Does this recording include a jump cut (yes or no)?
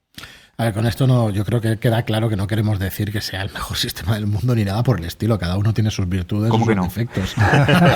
no